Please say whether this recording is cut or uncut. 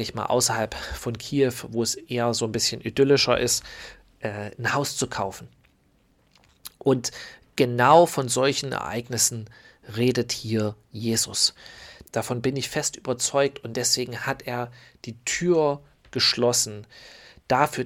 cut